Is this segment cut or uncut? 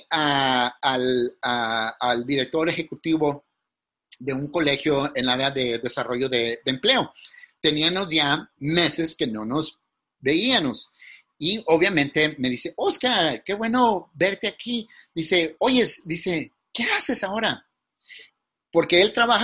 uncut